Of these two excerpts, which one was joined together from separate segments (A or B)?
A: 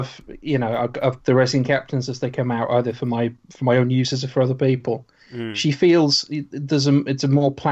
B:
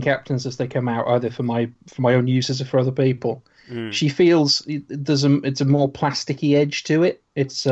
A